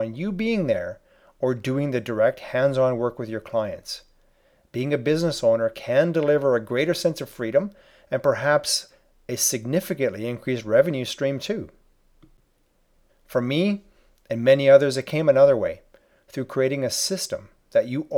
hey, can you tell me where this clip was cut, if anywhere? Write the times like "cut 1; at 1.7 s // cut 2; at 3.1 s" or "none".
cut 1; at 13.1 s